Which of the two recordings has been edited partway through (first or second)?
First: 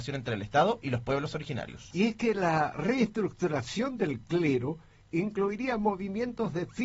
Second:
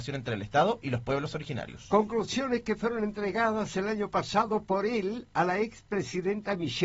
first